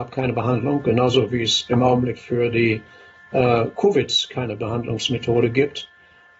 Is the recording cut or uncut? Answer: uncut